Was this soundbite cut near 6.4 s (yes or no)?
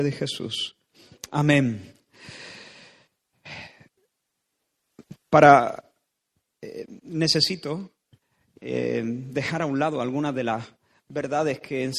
no